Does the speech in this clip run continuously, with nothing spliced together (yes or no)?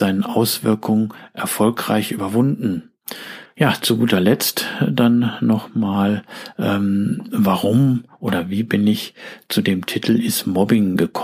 no